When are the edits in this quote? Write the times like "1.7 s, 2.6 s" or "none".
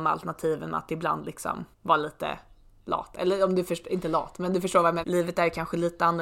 1.7 s, 5.0 s